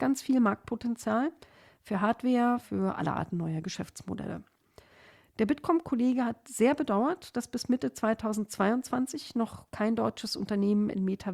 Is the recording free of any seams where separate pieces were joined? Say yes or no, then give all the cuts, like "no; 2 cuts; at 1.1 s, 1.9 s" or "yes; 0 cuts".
no; 1 cut; at 2.6 s